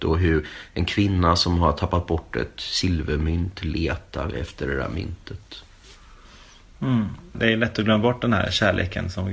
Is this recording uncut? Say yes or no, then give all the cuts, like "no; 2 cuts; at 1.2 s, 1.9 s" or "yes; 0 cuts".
no; 1 cut; at 7.3 s